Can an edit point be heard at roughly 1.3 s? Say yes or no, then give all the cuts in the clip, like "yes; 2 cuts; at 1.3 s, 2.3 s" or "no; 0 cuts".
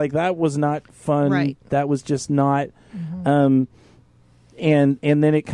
no; 1 cut; at 2.9 s